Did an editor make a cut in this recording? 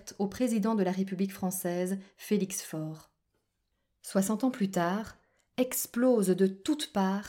no; 0 cuts

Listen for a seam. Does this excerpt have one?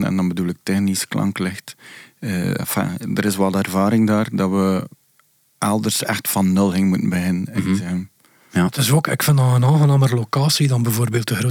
no; 0 cuts

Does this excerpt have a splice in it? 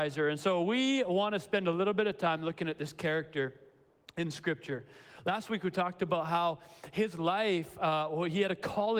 no; 0 cuts

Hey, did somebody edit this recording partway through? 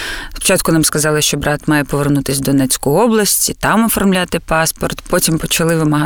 no; 0 cuts

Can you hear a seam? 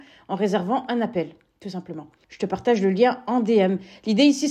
yes; 1 cut; at 2.2 s

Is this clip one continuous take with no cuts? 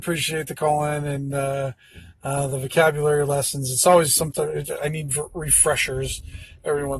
yes; 0 cuts

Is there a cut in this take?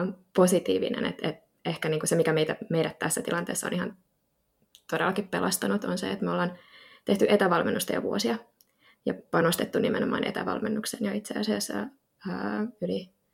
no; 0 cuts

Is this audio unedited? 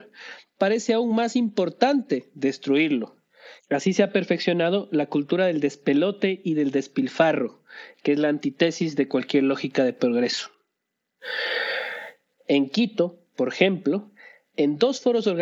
no; 2 cuts; at 3.6 s, 12.4 s

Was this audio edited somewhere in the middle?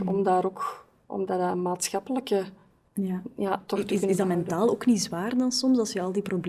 no; 0 cuts

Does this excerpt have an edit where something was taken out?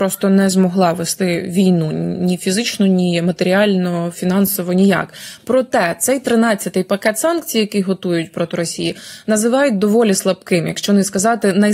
no; 0 cuts

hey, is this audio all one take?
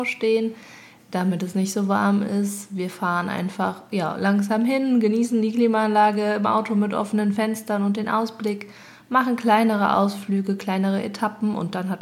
yes; 0 cuts

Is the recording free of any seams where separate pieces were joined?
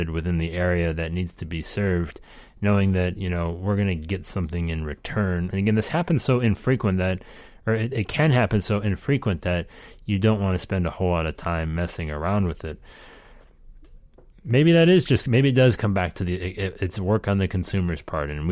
no; 2 cuts; at 5.5 s, 7.9 s

